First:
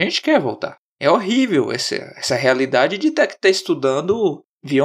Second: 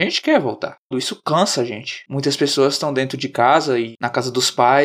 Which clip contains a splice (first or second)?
second